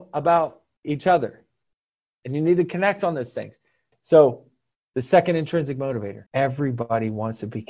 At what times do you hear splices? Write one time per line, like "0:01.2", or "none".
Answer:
0:03.9
0:06.3